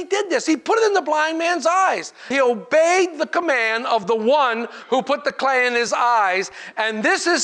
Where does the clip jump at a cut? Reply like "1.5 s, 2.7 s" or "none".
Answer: 2.3 s